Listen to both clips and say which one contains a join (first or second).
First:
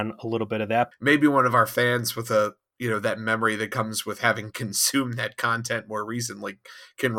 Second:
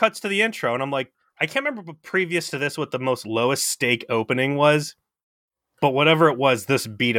first